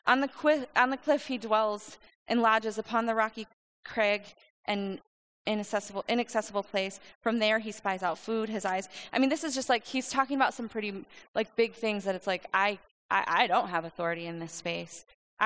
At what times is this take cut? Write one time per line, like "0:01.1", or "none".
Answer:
none